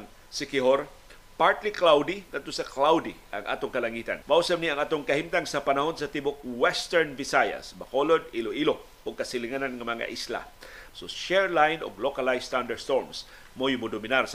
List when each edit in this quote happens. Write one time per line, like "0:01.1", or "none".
0:04.2
0:10.9